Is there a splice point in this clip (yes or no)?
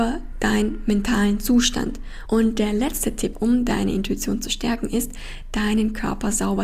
yes